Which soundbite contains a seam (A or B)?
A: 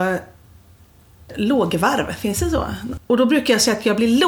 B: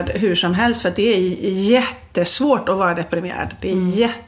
A